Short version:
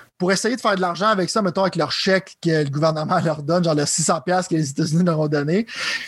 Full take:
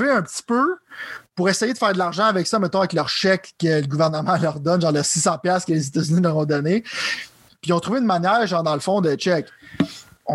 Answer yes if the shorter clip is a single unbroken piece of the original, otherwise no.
yes